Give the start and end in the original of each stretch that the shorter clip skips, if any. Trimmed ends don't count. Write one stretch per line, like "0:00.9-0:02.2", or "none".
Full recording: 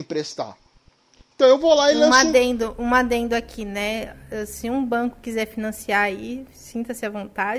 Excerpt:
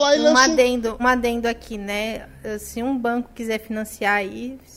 0:02.8-0:02.9